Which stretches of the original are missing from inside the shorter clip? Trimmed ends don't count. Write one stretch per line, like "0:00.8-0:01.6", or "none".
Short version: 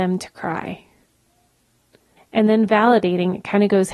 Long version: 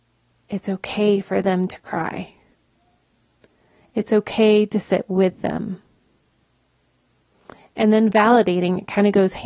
0:03.7-0:07.6